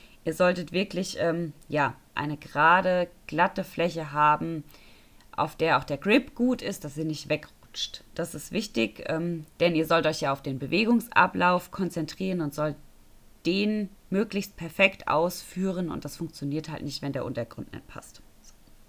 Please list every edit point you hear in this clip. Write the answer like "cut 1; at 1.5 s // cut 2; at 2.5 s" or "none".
cut 1; at 9.5 s